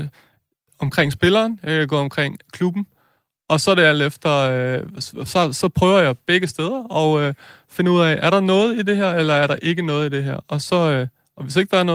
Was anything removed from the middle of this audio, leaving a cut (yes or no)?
no